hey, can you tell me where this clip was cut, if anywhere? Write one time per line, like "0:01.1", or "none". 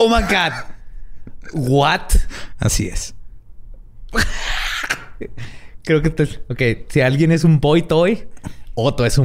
none